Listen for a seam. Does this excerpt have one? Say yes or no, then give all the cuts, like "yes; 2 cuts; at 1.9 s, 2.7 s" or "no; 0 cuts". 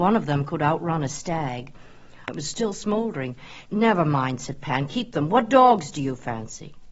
yes; 2 cuts; at 2.3 s, 3.7 s